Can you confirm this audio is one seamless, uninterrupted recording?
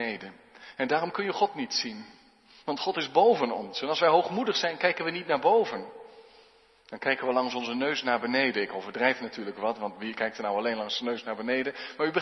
yes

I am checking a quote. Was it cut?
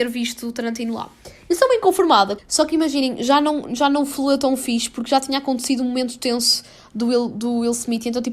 yes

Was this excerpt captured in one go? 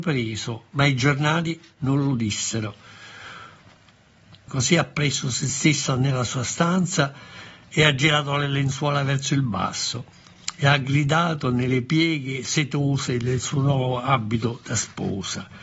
no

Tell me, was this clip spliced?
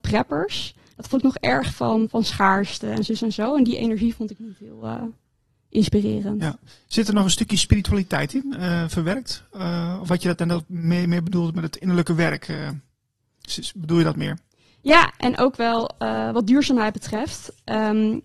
no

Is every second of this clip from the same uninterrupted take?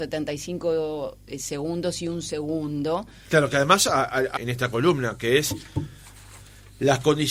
no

